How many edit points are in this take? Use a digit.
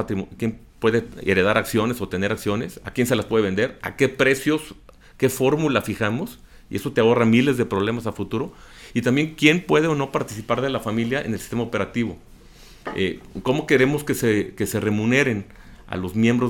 0